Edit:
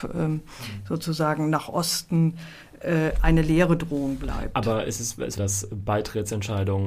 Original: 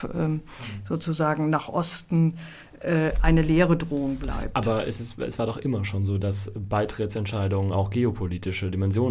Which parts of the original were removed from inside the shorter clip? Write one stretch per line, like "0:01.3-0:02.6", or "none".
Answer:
0:05.4-0:06.2